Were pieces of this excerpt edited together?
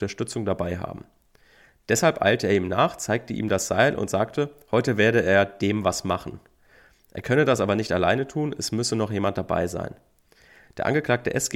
no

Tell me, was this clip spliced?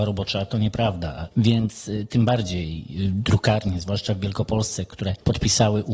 yes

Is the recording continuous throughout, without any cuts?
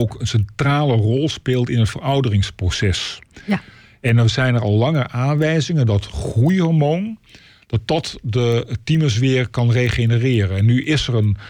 yes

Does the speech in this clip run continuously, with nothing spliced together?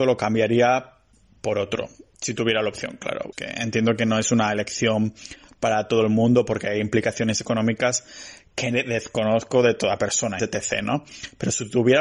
no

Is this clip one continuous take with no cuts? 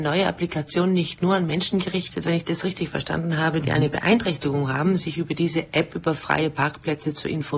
no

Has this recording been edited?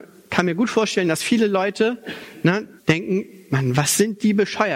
yes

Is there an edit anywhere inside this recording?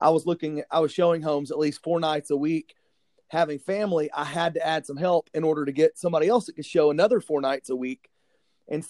no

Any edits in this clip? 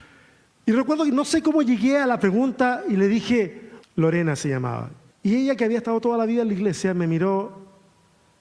yes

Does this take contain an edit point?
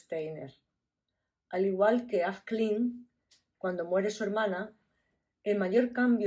no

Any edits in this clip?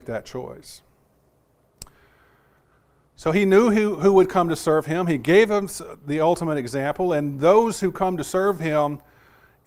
no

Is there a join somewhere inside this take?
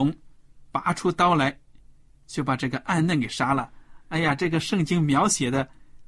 no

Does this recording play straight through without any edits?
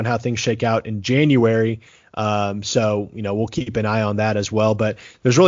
yes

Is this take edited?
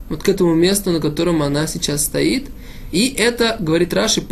no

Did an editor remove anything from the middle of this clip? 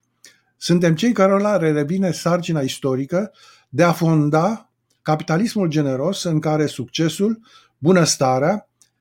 no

